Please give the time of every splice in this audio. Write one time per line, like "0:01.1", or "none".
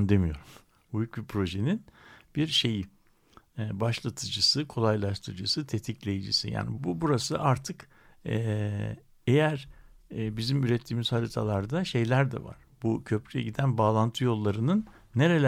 0:06.7